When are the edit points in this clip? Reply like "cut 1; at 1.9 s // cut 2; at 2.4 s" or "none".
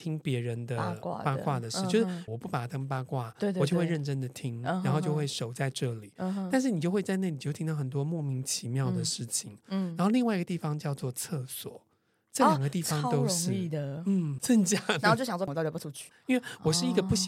cut 1; at 2.3 s // cut 2; at 14.4 s // cut 3; at 16.1 s